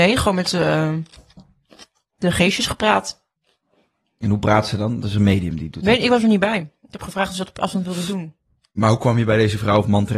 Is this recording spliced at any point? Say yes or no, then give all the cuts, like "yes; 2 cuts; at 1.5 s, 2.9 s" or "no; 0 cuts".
no; 0 cuts